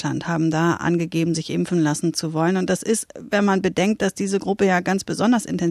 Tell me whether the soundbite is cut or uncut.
uncut